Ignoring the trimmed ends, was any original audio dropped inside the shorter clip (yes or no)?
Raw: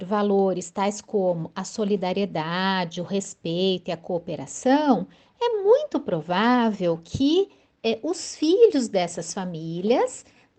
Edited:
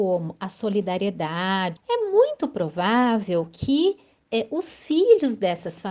yes